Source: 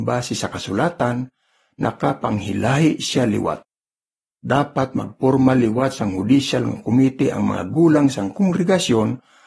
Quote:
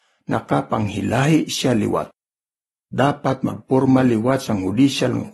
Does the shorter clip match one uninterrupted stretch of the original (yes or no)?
yes